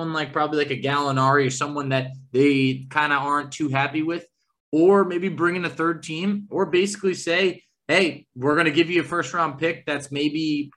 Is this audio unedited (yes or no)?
yes